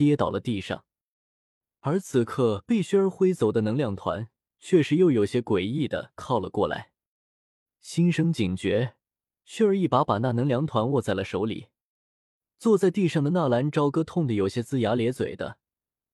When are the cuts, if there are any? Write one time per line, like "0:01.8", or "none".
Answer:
none